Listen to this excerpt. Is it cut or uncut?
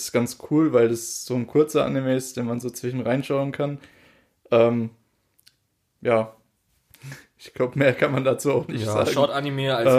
uncut